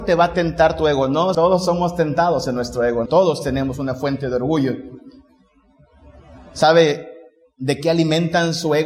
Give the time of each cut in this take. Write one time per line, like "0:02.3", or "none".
0:01.3
0:03.1